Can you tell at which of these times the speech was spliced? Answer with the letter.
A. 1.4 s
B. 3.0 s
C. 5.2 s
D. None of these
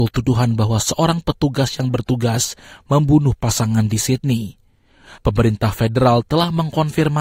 C